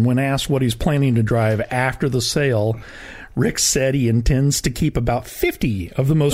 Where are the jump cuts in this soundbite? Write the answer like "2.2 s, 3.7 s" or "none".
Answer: none